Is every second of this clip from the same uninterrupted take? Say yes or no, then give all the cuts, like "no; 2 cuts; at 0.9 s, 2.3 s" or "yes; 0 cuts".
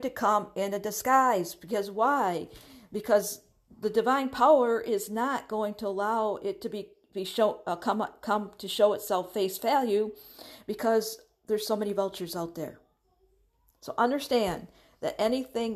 yes; 0 cuts